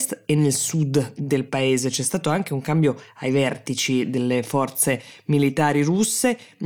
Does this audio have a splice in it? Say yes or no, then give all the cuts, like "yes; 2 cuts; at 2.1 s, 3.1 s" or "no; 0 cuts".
no; 0 cuts